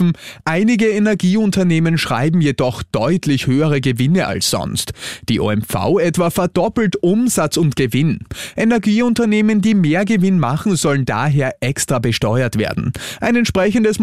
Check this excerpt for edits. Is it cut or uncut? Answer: uncut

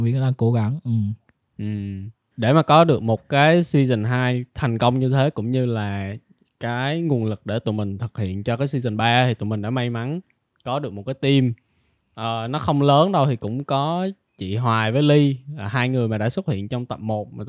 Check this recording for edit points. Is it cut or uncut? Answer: uncut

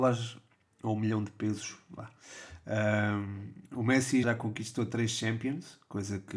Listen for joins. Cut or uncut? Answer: cut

